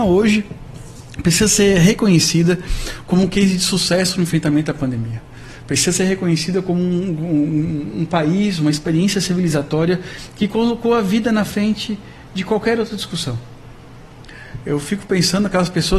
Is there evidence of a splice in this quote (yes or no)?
no